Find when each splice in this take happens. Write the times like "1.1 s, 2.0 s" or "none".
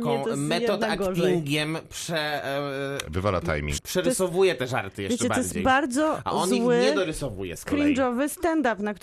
3.8 s

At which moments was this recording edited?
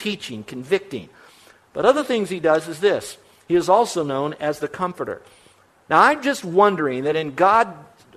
none

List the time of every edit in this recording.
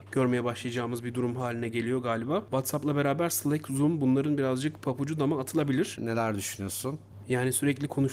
6.0 s

